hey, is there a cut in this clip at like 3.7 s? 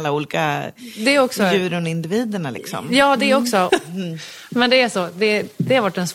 yes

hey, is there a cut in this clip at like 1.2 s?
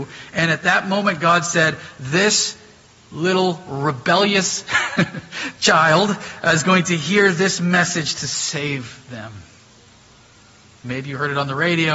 no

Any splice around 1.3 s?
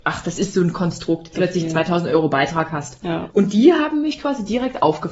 yes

